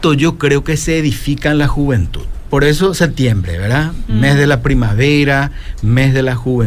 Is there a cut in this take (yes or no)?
no